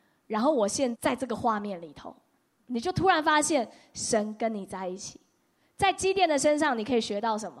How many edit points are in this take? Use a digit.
1